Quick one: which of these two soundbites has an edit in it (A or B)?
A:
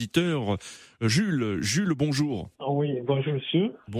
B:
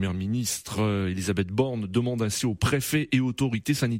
A